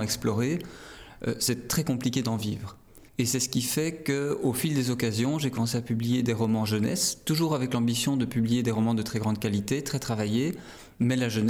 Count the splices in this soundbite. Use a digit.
1